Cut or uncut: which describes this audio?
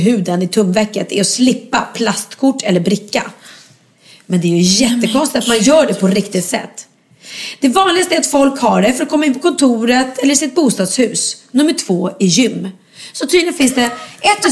uncut